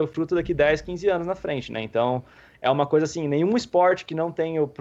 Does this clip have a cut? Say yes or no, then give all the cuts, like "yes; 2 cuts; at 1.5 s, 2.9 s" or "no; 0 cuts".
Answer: no; 0 cuts